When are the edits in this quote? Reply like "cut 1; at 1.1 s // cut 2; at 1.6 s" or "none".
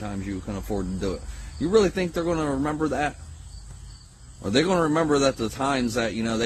none